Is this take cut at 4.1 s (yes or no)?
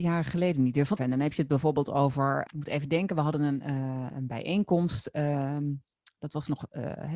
no